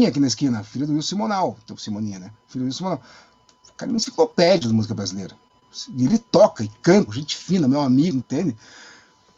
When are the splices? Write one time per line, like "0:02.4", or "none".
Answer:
0:07.1
0:08.2